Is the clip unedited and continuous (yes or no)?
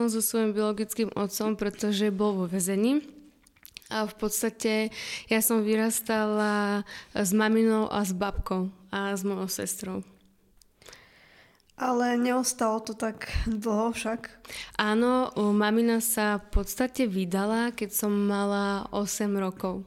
yes